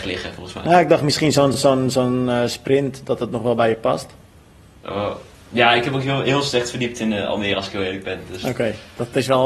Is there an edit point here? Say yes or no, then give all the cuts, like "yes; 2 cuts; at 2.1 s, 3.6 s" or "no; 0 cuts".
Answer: no; 0 cuts